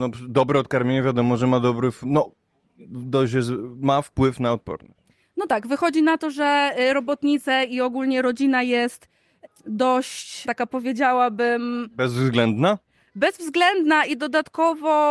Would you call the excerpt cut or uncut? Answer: uncut